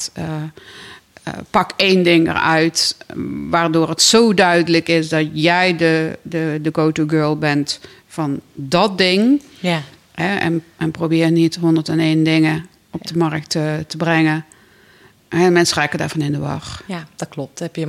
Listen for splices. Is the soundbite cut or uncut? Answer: uncut